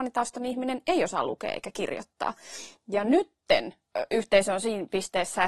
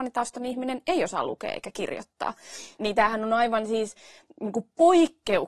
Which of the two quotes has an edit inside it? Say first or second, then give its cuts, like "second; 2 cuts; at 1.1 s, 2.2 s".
second; 1 cut; at 2.8 s